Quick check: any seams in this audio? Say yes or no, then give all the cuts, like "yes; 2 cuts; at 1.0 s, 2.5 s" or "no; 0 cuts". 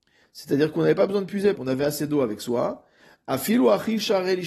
yes; 1 cut; at 1.6 s